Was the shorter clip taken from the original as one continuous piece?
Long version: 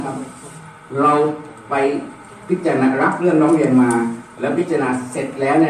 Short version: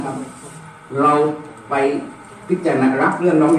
yes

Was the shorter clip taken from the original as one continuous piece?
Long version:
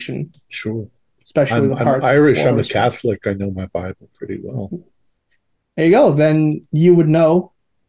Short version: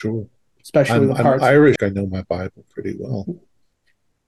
no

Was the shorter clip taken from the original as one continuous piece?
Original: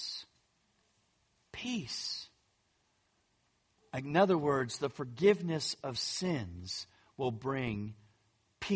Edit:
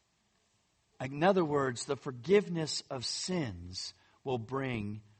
no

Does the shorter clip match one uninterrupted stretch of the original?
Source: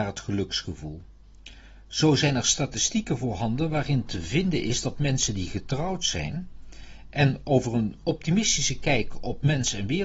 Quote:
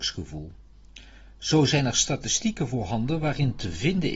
yes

